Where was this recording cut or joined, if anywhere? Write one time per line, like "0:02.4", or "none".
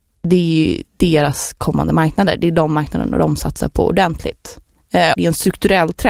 0:05.1